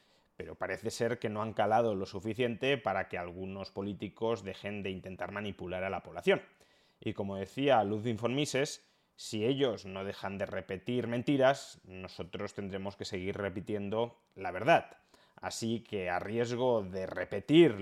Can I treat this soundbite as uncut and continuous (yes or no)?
yes